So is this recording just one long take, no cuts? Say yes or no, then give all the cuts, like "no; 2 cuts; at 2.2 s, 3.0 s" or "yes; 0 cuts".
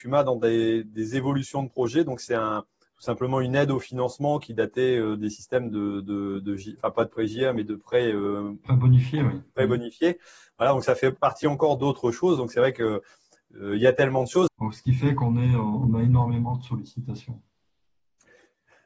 no; 1 cut; at 14.5 s